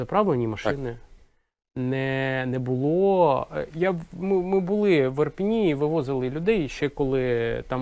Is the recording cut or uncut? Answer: uncut